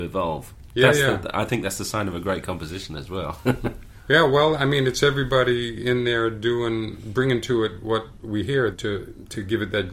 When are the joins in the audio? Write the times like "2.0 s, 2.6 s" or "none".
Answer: none